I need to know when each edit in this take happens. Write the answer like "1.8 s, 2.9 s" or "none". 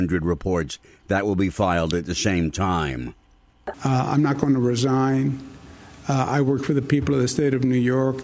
3.7 s